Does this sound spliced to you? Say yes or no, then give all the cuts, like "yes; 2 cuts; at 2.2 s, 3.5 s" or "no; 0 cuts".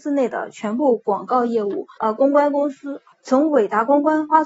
yes; 2 cuts; at 2.0 s, 3.1 s